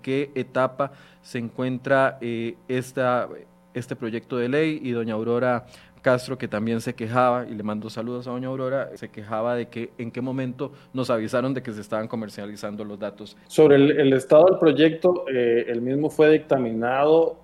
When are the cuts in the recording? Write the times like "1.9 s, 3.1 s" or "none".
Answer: 9.0 s, 13.5 s